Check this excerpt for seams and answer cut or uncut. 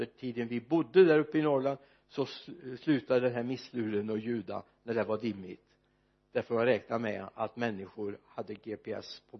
uncut